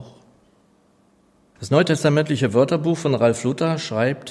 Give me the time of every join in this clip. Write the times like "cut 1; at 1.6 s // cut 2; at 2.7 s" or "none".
cut 1; at 1.6 s